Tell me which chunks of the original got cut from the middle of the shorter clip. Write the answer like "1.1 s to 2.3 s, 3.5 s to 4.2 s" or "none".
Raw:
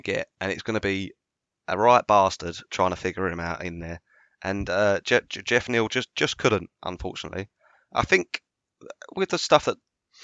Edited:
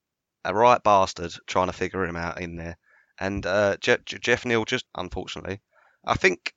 6.1 s to 6.7 s

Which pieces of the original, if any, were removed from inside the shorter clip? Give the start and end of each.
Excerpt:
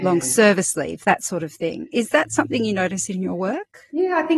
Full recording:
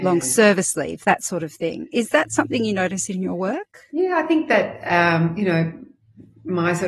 none

